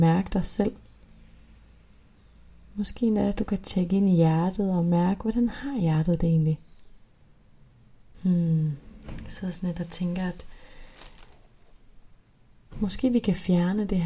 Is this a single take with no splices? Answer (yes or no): no